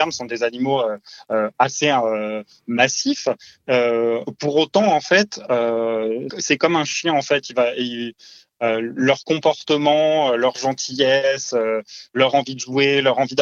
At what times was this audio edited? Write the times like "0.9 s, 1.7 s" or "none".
6.3 s